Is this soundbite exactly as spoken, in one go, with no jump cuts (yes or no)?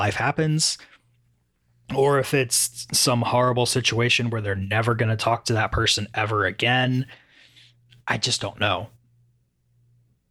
yes